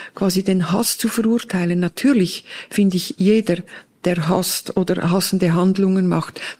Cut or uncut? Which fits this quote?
uncut